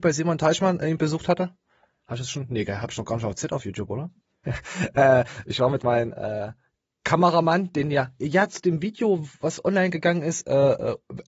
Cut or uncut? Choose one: cut